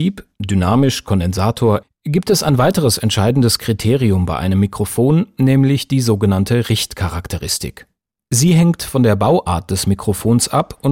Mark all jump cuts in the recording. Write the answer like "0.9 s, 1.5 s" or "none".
1.8 s

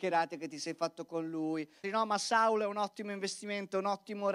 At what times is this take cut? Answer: 1.8 s

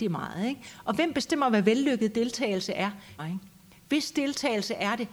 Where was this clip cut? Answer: 3.2 s

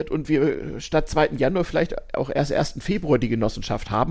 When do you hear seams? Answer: none

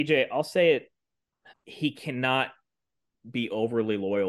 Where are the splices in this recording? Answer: 1.5 s

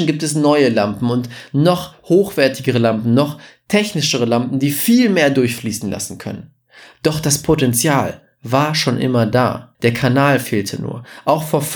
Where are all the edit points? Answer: 9.7 s

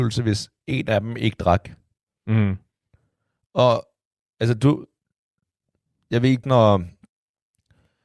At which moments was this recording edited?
6.4 s

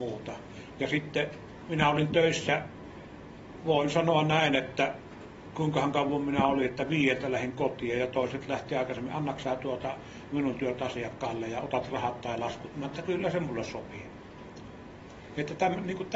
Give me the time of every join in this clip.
none

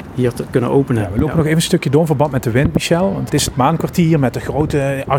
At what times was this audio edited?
3.3 s

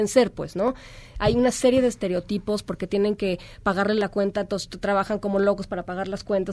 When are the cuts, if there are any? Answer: none

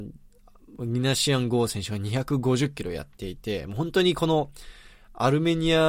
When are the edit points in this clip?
none

